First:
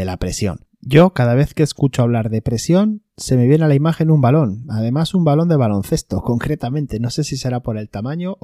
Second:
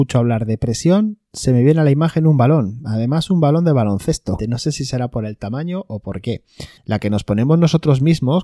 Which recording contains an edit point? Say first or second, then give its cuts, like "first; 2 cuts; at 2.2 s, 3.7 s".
second; 2 cuts; at 4.4 s, 6.8 s